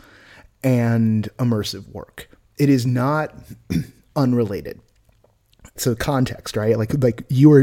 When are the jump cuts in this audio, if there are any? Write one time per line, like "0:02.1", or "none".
0:05.8